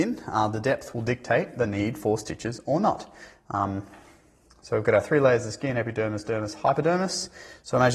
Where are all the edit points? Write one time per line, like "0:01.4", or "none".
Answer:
none

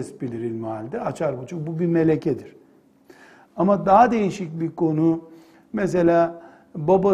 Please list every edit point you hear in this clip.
none

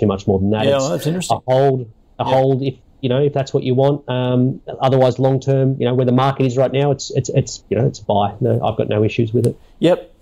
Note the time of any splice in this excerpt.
none

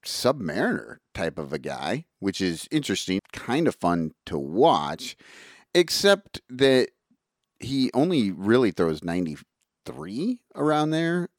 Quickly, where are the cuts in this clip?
0:03.2

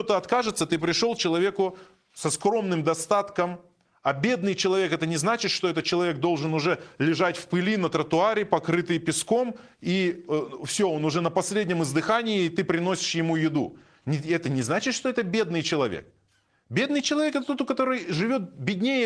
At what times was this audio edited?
none

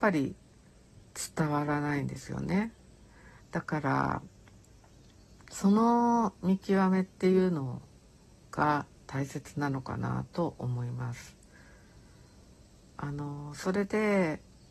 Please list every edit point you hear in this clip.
0:03.4

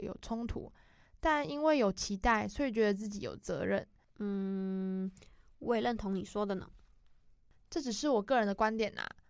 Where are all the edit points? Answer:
0:04.0

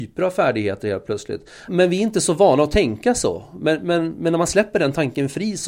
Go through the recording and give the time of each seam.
0:01.7

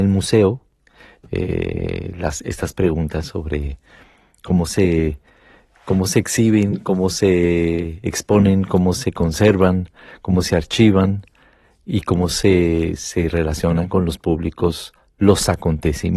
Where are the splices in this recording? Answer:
none

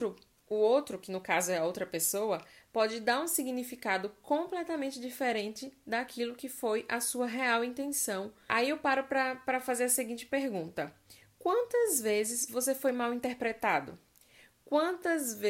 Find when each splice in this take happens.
none

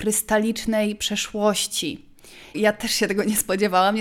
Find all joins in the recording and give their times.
0:02.5

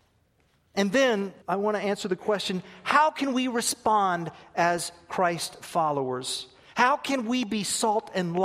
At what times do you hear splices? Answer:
0:01.4

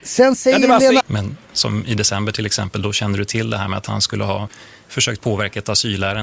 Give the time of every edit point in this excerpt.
0:01.0

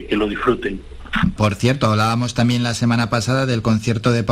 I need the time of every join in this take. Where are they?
0:01.4

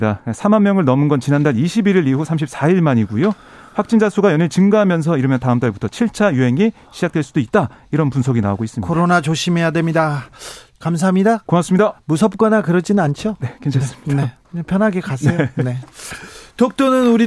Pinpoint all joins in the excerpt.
0:10.8
0:14.4

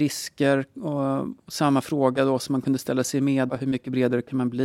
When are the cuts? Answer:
0:03.5

